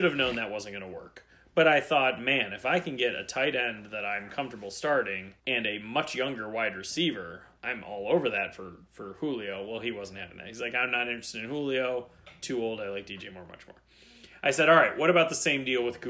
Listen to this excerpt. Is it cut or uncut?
cut